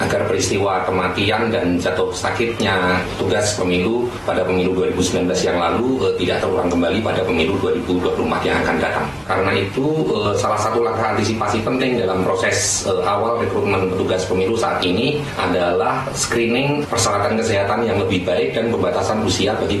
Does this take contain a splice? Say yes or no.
no